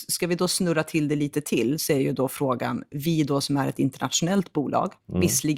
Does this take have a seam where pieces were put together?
no; 0 cuts

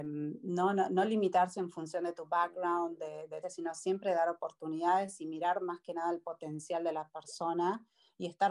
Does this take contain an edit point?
yes; 1 cut; at 3.4 s

